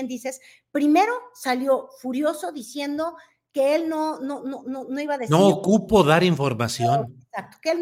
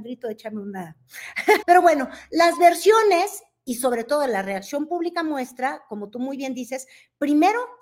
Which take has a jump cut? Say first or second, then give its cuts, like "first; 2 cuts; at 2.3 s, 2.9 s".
second; 1 cut; at 1.6 s